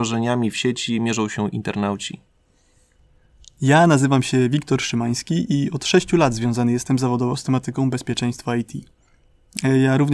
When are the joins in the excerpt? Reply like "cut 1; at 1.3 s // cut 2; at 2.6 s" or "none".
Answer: none